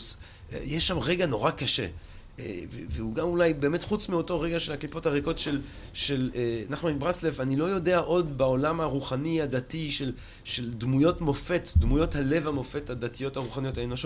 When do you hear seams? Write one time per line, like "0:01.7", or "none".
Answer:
0:06.3